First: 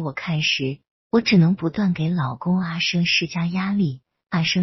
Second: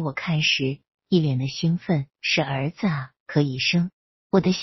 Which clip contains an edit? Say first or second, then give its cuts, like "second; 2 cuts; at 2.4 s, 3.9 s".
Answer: first; 1 cut; at 0.9 s